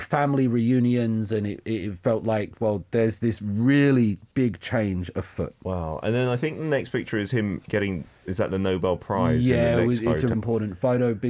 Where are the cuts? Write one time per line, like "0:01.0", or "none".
0:10.3

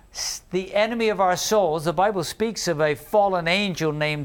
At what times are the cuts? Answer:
none

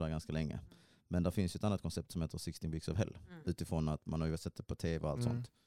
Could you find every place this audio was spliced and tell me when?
0:03.4

